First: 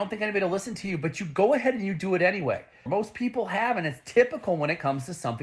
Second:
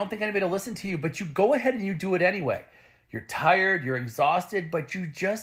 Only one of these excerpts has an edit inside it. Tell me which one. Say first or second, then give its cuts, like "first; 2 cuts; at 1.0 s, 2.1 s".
first; 1 cut; at 2.9 s